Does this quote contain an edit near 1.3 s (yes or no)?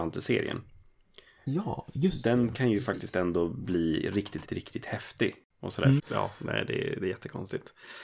no